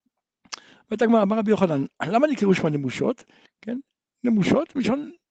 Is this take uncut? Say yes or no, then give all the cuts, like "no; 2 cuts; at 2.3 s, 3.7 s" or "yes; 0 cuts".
no; 1 cut; at 3.5 s